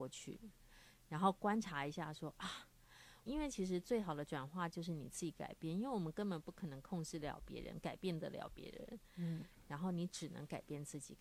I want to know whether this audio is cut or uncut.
cut